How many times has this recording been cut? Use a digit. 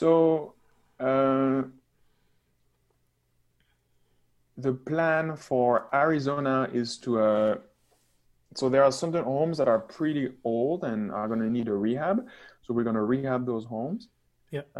0